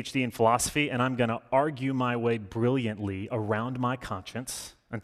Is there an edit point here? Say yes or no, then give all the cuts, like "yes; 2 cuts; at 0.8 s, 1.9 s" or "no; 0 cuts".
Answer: no; 0 cuts